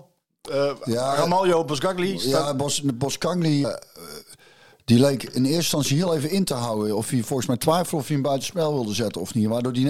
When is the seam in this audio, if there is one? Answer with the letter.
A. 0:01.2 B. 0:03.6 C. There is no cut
B